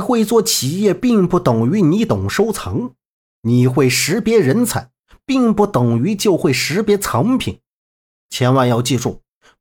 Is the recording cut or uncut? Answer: uncut